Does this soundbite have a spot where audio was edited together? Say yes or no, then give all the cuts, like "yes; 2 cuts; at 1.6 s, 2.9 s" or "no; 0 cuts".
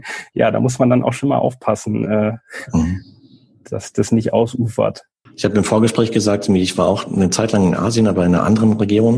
no; 0 cuts